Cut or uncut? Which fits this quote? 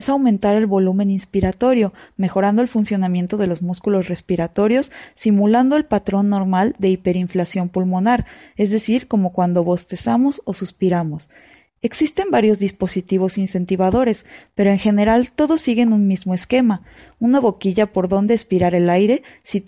uncut